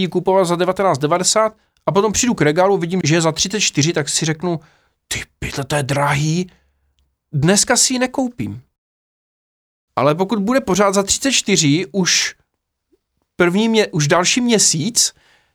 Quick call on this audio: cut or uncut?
cut